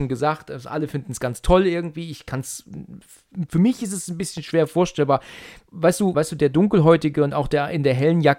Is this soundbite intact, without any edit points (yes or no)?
no